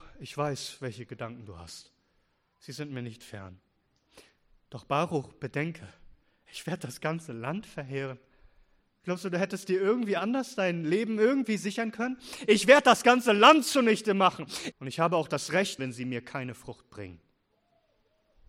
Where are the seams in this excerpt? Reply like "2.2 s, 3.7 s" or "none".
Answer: 14.7 s, 15.8 s